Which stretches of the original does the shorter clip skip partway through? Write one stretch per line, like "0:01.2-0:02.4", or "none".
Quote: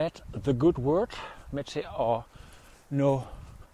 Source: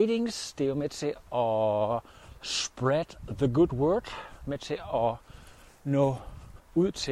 none

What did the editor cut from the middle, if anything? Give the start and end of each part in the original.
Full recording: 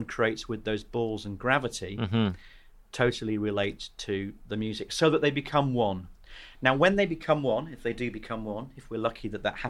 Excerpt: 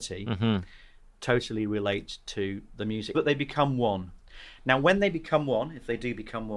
0:04.9-0:05.1

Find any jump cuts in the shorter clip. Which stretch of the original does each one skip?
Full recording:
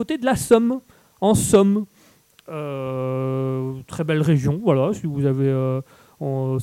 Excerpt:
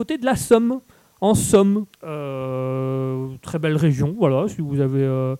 0:01.9-0:02.4

